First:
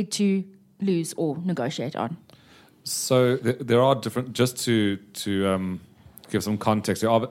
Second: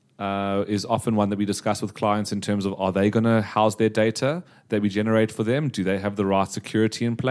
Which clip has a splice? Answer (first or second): first